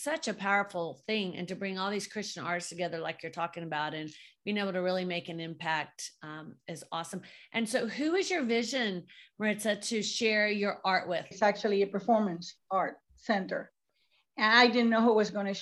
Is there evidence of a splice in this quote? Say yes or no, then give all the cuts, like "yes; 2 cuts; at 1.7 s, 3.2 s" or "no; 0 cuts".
yes; 1 cut; at 11.3 s